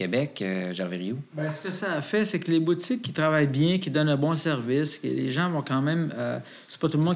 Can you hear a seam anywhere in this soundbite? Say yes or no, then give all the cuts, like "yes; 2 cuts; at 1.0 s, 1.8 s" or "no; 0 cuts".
no; 0 cuts